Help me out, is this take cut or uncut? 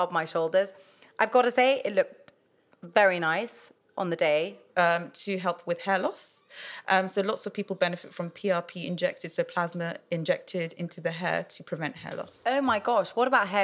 cut